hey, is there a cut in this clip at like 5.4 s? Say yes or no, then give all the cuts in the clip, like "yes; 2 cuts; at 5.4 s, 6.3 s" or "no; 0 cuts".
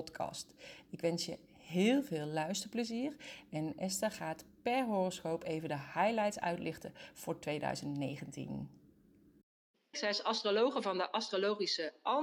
no; 1 cut; at 9.9 s